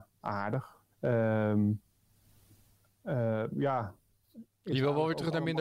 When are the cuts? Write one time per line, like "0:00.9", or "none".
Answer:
0:00.9
0:03.5